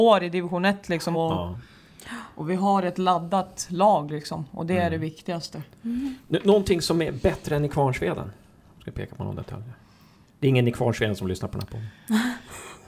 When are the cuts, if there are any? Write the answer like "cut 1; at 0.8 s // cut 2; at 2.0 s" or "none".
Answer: cut 1; at 1.1 s